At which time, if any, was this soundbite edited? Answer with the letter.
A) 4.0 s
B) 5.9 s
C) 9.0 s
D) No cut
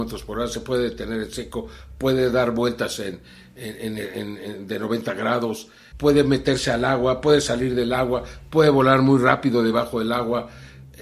B